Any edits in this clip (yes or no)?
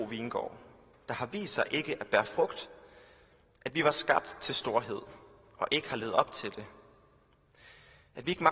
no